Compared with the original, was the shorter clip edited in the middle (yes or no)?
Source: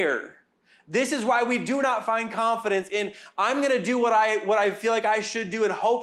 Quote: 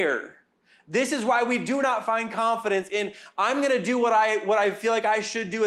no